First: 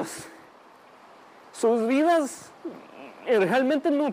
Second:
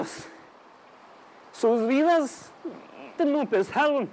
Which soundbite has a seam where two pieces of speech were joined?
second; 1 cut; at 3.2 s

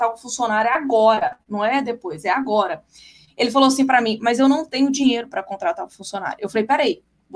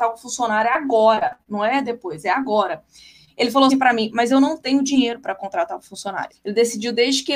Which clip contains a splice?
second; 2 cuts; at 3.7 s, 6.3 s

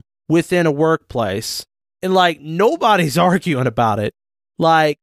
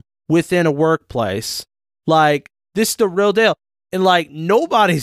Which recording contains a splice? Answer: first; 1 cut; at 1.8 s

